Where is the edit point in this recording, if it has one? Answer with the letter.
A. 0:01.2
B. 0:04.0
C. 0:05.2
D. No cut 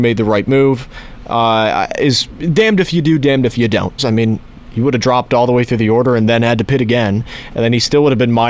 B